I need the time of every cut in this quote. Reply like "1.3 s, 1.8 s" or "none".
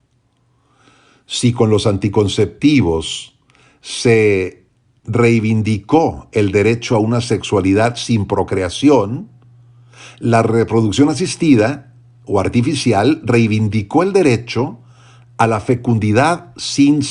none